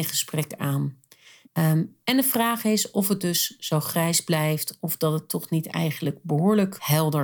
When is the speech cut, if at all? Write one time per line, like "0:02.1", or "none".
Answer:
0:01.4